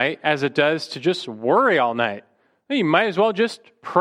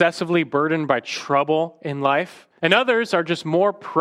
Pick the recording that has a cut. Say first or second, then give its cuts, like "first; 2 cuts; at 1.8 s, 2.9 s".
second; 1 cut; at 2.6 s